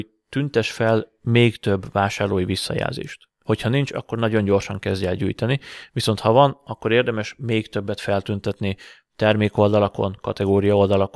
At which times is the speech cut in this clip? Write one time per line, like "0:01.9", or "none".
none